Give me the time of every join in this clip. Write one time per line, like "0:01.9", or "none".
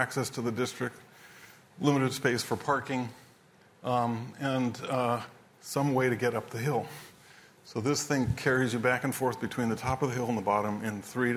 none